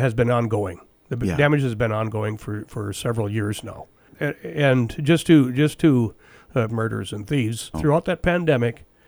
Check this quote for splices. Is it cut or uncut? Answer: cut